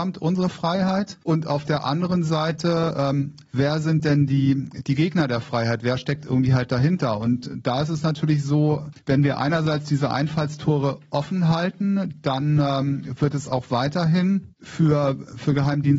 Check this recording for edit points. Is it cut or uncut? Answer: uncut